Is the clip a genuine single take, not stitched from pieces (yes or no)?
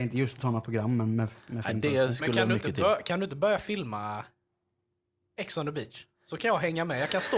yes